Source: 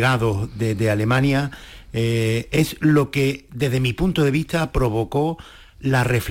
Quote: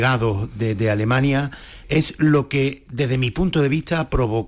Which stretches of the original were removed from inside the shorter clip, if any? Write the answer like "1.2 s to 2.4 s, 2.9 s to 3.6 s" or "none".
1.8 s to 2.5 s